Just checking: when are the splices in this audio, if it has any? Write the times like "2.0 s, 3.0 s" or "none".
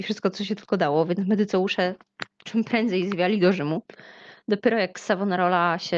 none

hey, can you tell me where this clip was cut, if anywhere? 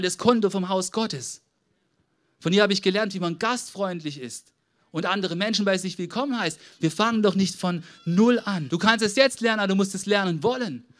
6.8 s, 8.7 s

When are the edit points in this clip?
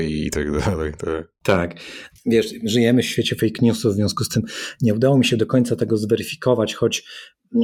2.1 s

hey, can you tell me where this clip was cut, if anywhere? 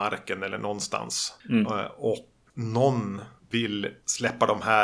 2.5 s

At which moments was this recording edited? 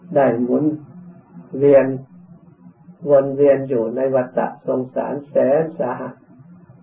1.5 s, 3.0 s

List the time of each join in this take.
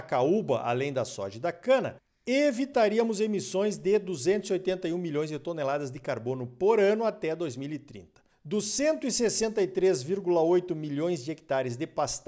8.3 s

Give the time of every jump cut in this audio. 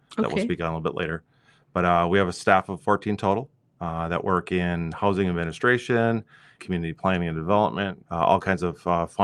6.6 s, 8.0 s

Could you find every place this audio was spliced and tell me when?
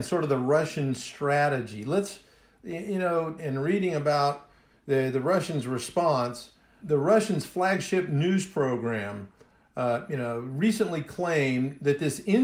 3.4 s, 6.8 s

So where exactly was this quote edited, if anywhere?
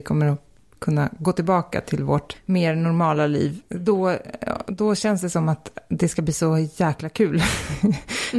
none

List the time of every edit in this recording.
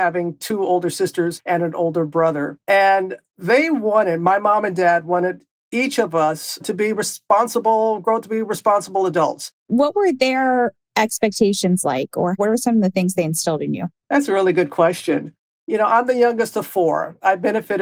9.5 s, 14.0 s

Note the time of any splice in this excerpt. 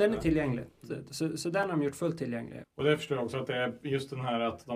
2.6 s

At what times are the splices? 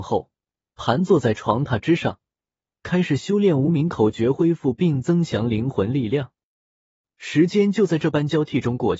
none

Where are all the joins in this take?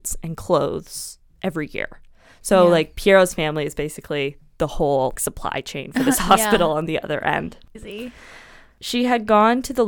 5.1 s, 7.7 s

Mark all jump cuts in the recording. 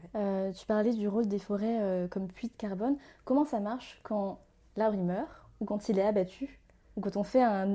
none

